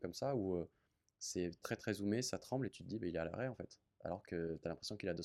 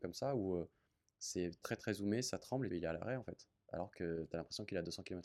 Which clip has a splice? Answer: second; 1 cut; at 2.7 s

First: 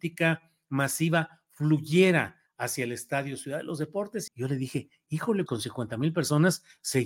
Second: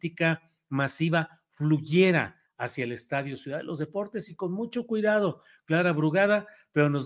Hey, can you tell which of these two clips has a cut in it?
first; 2 cuts; at 4.3 s, 5.5 s

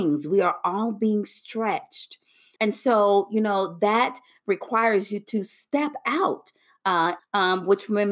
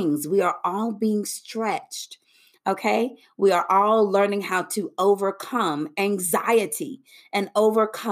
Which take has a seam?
first; 2 cuts; at 2.6 s, 7.2 s

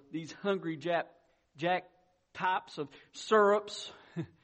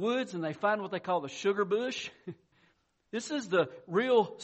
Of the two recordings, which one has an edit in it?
second; 1 cut; at 2.5 s

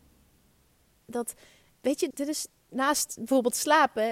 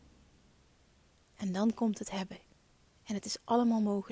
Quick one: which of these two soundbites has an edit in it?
first; 2 cuts; at 1.0 s, 2.1 s

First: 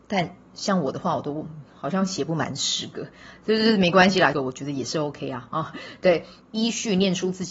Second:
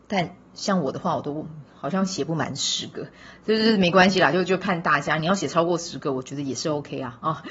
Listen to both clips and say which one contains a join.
first; 2 cuts; at 4.3 s, 6.4 s

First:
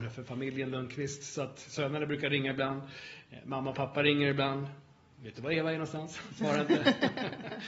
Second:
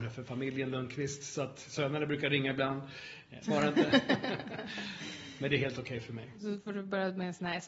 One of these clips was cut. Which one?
second; 1 cut; at 3.4 s

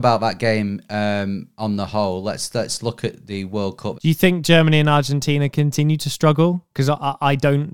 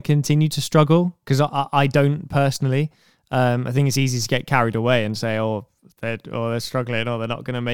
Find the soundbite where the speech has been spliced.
first; 1 cut; at 3.9 s

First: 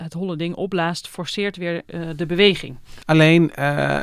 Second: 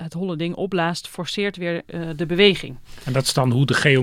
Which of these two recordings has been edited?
first; 1 cut; at 3.0 s

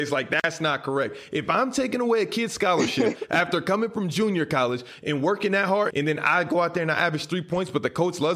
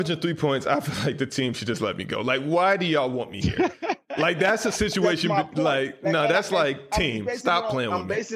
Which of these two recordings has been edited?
first; 1 cut; at 5.9 s

